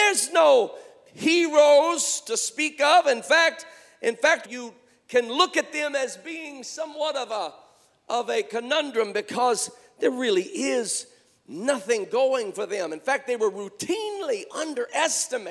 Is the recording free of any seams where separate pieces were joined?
no; 1 cut; at 4.4 s

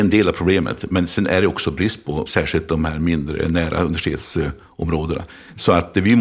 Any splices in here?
yes; 1 cut; at 2.3 s

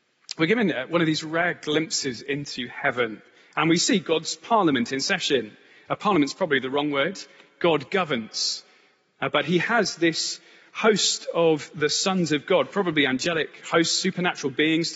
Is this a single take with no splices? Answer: yes; 0 cuts

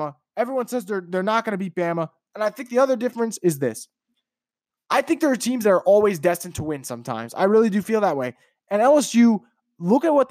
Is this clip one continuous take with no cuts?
no; 1 cut; at 2.3 s

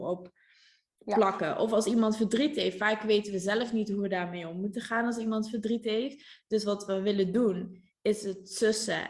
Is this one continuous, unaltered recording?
yes; 0 cuts

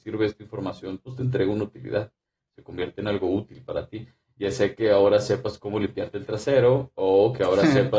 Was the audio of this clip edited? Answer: no; 0 cuts

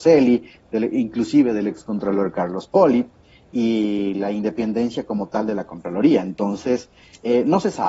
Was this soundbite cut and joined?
no; 0 cuts

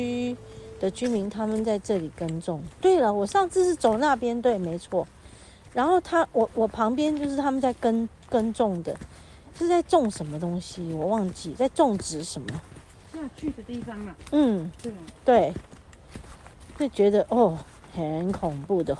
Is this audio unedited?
yes; 0 cuts

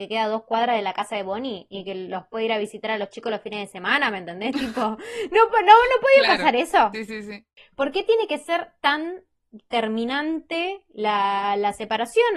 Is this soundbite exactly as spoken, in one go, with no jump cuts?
yes; 0 cuts

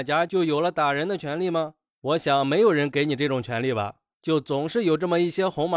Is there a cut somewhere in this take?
no; 0 cuts

